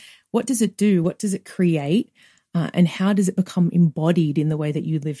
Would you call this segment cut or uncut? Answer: uncut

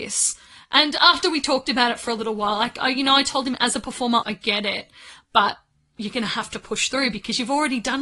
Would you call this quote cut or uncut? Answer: cut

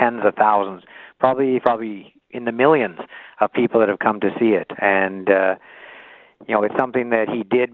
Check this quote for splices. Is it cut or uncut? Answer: cut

